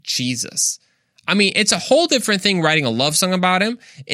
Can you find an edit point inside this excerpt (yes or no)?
no